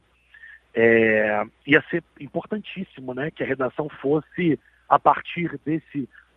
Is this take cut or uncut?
uncut